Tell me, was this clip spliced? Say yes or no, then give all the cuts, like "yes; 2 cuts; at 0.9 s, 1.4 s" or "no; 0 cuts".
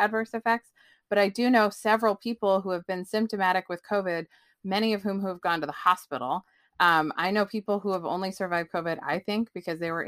no; 0 cuts